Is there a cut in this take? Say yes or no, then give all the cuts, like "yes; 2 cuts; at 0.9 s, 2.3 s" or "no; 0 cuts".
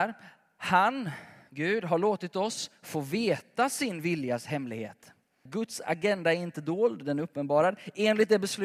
yes; 1 cut; at 5.5 s